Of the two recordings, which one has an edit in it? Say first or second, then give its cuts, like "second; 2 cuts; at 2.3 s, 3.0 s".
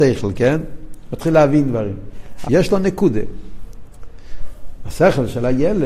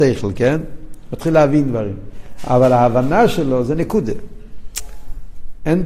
first; 1 cut; at 2.4 s